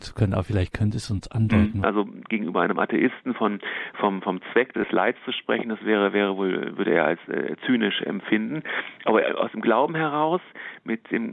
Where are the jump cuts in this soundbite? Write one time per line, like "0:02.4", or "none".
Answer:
0:01.8